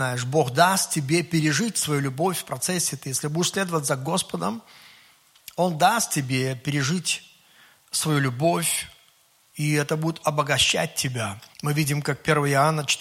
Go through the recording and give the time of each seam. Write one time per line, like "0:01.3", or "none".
0:11.5